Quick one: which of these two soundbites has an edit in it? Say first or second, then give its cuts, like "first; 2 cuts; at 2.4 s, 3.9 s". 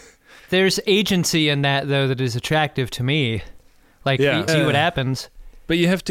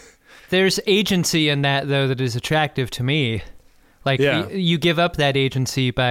first; 1 cut; at 4.5 s